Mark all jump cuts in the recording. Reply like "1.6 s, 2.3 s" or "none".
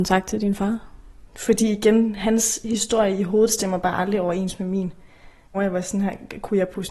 1.3 s, 5.5 s